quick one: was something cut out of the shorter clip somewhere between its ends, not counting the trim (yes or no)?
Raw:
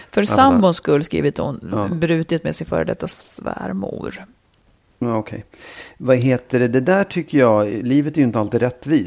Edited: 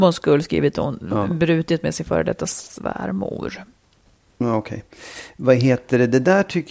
no